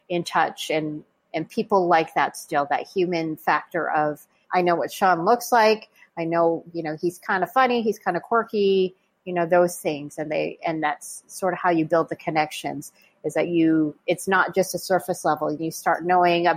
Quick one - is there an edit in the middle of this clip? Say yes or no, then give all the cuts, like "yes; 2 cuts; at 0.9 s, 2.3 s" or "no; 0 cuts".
yes; 2 cuts; at 4.4 s, 15.6 s